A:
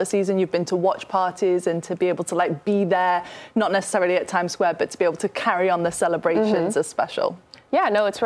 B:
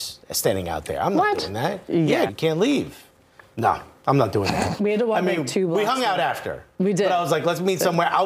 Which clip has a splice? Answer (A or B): B